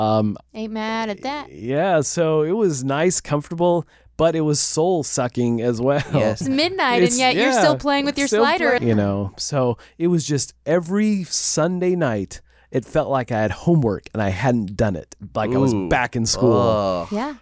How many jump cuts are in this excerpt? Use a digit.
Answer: 2